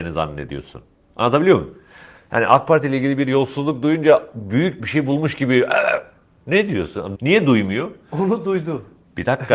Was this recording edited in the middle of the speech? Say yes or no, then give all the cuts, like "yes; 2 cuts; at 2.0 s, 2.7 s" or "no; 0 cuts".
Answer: yes; 2 cuts; at 4.8 s, 7.2 s